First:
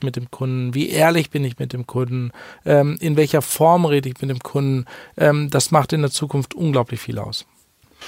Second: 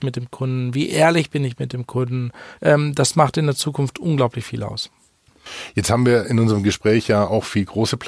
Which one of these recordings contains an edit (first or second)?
second